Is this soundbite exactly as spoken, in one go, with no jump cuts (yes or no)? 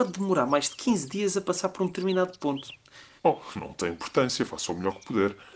no